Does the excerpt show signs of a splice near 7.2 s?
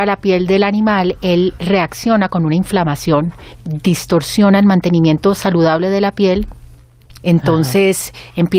yes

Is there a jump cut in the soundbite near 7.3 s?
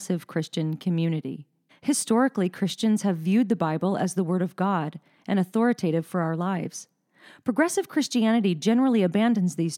no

